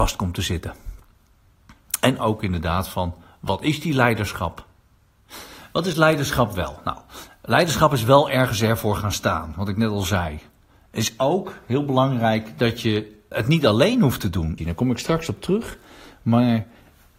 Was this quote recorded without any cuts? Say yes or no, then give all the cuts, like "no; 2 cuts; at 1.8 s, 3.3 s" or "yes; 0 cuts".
no; 2 cuts; at 13.3 s, 14.6 s